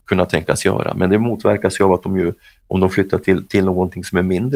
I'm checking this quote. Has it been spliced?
no; 0 cuts

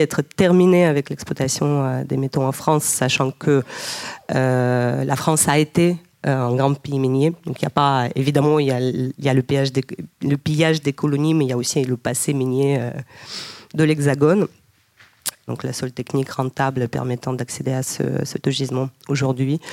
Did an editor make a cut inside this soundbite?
yes; 2 cuts; at 15.5 s, 18.4 s

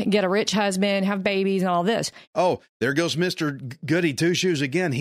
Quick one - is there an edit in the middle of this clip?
yes; 1 cut; at 2.2 s

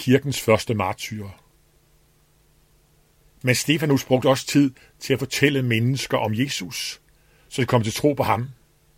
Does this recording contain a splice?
yes; 1 cut; at 3.2 s

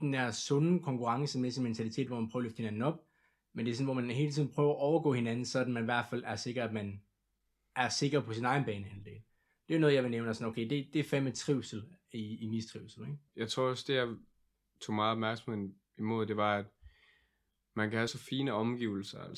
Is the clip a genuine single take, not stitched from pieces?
no; 2 cuts; at 13.3 s, 18.1 s

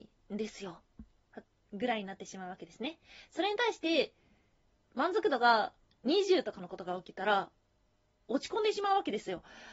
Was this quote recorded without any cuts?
no; 1 cut; at 1.4 s

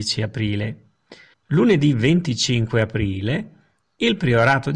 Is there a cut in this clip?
yes; 1 cut; at 1.3 s

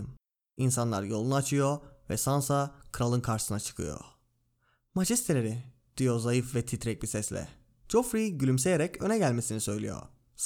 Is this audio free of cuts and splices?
yes; 0 cuts

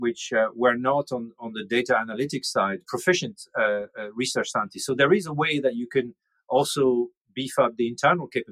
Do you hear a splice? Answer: yes; 1 cut; at 2.8 s

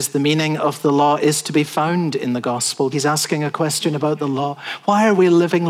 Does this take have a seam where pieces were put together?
yes; 1 cut; at 2.9 s

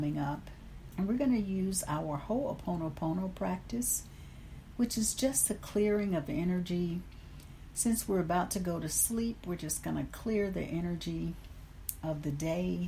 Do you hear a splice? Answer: yes; 1 cut; at 0.9 s

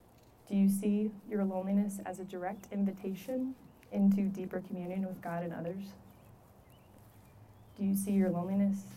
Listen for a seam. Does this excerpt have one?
no; 0 cuts

